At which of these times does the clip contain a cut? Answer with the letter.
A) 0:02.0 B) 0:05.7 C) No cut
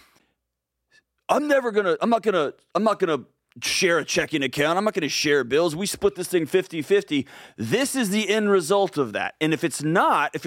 C